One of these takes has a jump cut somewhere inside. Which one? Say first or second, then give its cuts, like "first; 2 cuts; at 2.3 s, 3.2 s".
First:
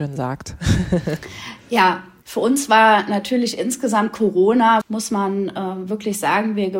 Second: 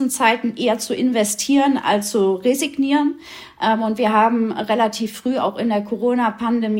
first; 1 cut; at 4.8 s